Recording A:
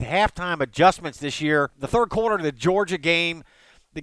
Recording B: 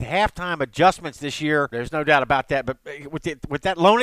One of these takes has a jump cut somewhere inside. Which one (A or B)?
B